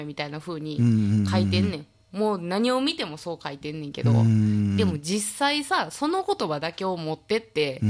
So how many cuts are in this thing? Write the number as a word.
zero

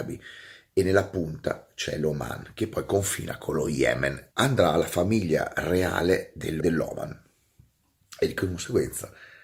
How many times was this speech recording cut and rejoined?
two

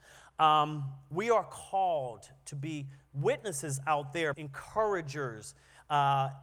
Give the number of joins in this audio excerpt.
one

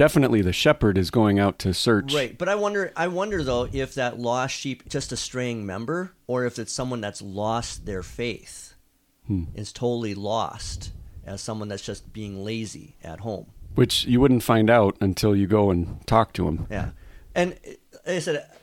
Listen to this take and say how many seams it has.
one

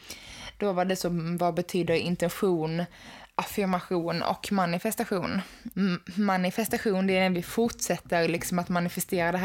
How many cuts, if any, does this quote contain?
one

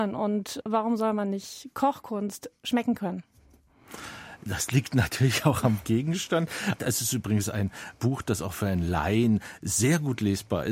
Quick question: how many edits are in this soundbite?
one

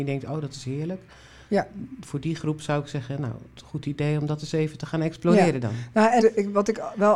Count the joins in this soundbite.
one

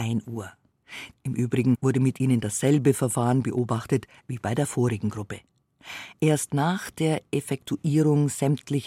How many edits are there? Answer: one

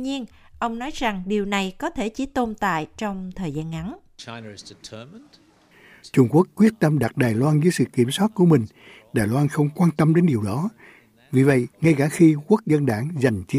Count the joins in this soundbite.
one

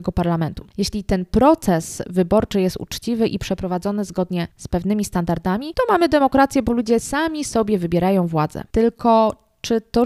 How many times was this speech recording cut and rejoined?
zero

